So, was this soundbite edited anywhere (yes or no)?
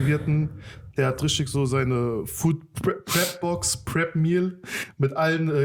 no